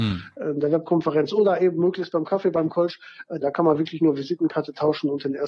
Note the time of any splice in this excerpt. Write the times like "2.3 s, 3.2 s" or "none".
3.4 s